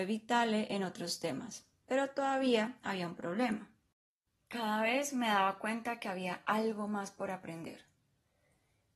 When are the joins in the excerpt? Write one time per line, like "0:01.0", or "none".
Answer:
none